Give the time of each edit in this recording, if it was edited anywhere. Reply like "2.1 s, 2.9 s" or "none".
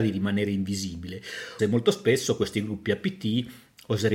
1.6 s